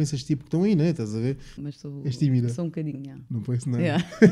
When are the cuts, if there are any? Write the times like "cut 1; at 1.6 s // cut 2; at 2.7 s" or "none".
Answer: cut 1; at 1.6 s